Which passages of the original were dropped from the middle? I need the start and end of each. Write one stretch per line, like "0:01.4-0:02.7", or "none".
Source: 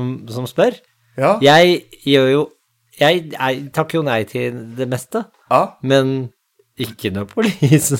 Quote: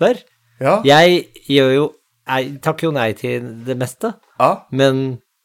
0:02.8-0:03.4